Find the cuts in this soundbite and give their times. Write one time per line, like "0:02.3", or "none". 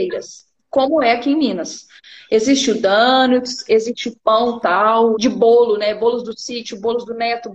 0:03.7
0:05.1